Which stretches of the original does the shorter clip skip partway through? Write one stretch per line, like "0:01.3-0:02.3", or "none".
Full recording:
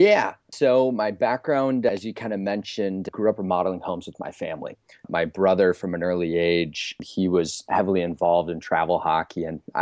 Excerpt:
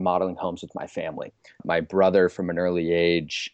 none